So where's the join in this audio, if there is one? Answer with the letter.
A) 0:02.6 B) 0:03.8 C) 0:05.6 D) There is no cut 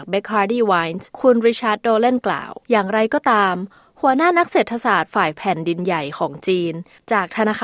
A